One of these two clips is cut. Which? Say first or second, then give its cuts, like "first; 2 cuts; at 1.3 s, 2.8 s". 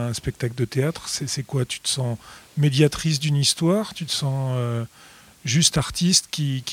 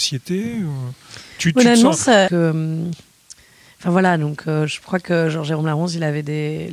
second; 1 cut; at 2.3 s